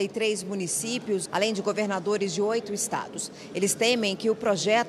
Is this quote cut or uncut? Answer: cut